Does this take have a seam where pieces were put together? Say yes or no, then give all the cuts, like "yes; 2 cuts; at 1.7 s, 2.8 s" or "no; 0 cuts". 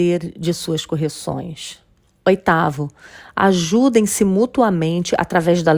no; 0 cuts